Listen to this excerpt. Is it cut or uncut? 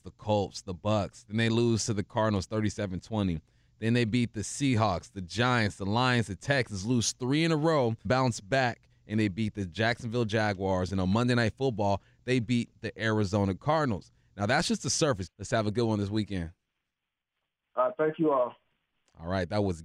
cut